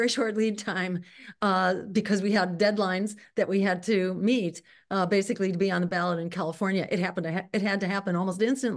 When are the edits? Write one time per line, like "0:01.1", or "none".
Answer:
none